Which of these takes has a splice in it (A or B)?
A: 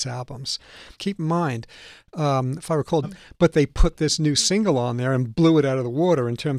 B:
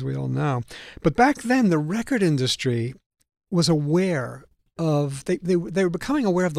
A